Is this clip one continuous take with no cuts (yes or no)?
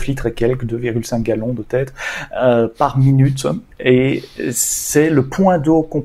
yes